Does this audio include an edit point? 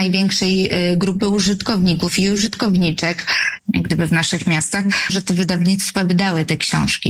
yes; 2 cuts; at 3.6 s, 5.1 s

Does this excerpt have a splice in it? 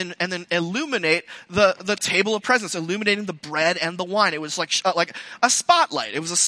no; 0 cuts

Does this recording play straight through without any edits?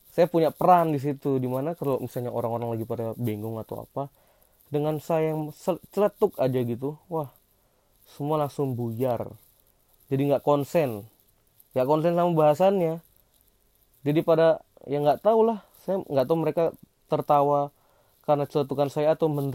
yes; 0 cuts

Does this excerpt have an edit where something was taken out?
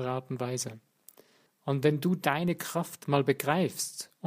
yes; 1 cut; at 1.5 s

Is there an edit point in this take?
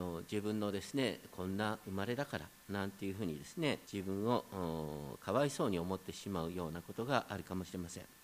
yes; 1 cut; at 3.8 s

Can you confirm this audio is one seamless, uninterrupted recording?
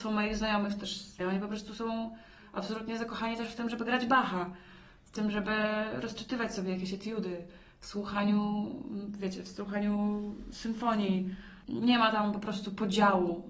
no; 1 cut; at 1.2 s

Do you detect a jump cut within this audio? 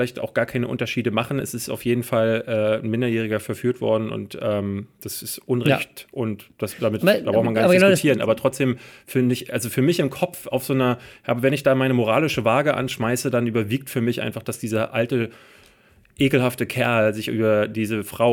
no; 0 cuts

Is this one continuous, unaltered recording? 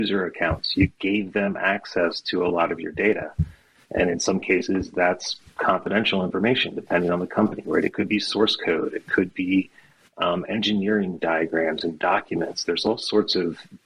yes; 0 cuts

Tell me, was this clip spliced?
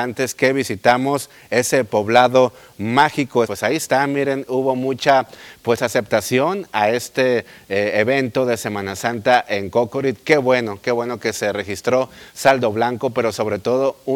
yes; 1 cut; at 3.4 s

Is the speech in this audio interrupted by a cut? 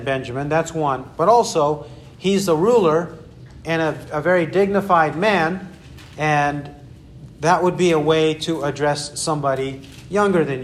no; 0 cuts

